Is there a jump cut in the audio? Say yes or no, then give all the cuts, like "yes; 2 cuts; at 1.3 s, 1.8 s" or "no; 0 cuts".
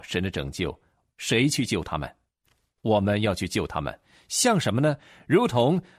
no; 0 cuts